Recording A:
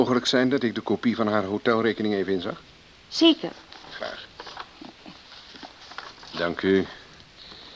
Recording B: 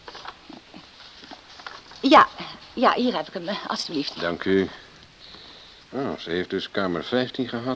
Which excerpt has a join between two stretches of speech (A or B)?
A